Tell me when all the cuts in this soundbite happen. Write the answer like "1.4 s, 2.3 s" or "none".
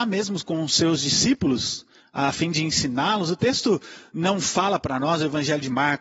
none